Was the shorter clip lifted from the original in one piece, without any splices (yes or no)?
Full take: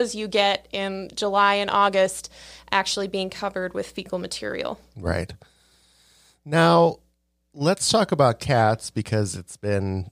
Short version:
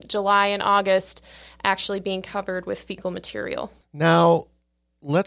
no